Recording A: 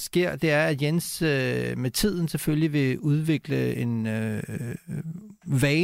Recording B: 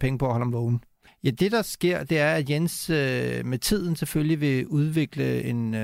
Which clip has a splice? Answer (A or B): B